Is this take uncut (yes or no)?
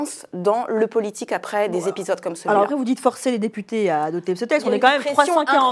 yes